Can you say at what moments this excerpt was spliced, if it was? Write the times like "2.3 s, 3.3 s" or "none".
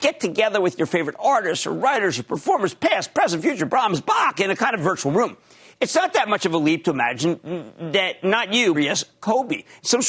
3.7 s, 8.7 s